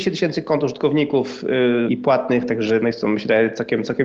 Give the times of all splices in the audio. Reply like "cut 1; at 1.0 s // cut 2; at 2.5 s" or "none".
cut 1; at 1.9 s